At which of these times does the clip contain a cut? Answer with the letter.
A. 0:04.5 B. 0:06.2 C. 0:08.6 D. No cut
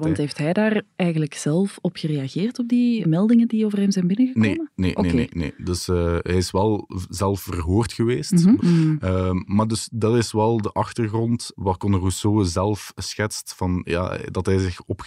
C